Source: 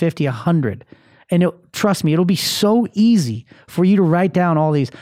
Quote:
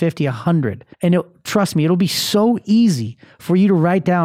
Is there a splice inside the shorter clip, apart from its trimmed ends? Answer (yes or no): yes